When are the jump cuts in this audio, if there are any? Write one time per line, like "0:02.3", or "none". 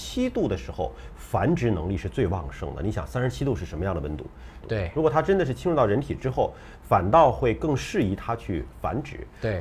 0:04.6

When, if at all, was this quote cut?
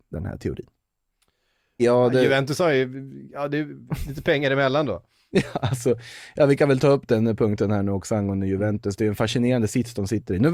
0:01.8

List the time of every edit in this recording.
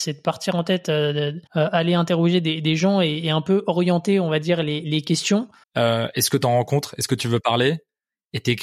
0:01.5
0:05.6

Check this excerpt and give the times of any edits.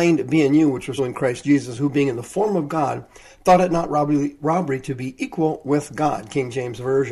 0:01.0

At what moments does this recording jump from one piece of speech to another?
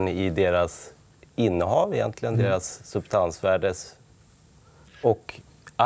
none

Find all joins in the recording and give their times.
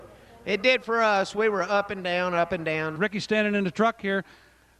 0:03.0

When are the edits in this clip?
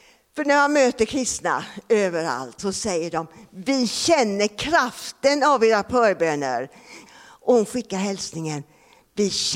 0:02.6
0:07.1

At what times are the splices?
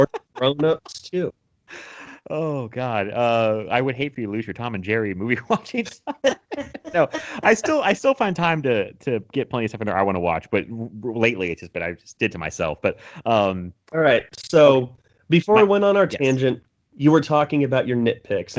none

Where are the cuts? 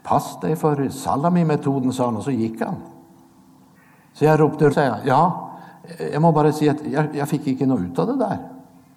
0:04.7

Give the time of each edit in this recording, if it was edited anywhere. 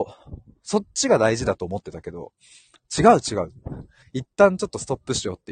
0:04.0

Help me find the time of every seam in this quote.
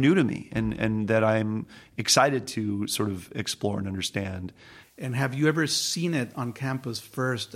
0:04.8

